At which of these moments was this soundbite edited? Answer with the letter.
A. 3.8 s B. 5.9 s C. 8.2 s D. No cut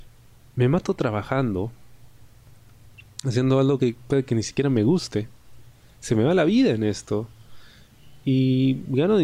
D